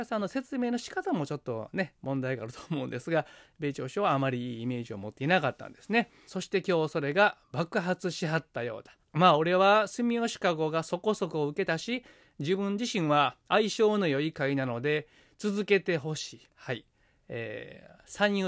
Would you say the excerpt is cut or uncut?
cut